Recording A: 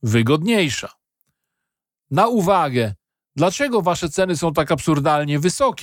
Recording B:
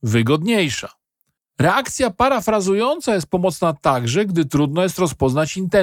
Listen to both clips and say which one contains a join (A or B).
B